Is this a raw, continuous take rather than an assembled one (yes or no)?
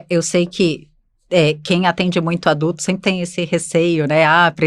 yes